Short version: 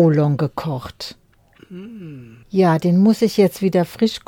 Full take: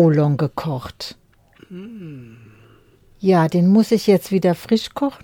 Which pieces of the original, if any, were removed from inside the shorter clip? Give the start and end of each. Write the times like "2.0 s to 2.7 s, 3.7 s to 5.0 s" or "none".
2.4 s to 3.1 s